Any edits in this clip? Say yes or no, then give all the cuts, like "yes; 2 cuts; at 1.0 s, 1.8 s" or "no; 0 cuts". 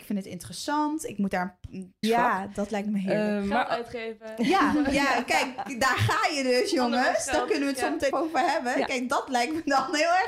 yes; 2 cuts; at 2.0 s, 8.1 s